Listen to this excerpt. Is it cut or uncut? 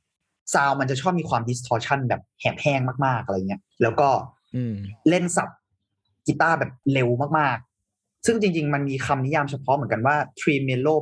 cut